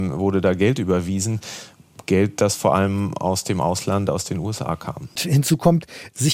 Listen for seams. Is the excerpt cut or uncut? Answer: cut